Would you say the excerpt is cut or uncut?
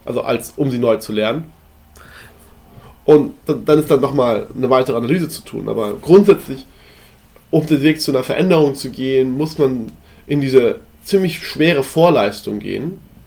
cut